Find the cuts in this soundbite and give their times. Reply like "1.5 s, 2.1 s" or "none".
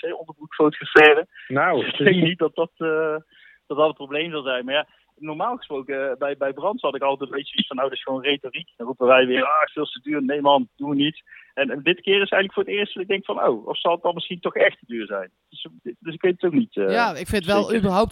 9.7 s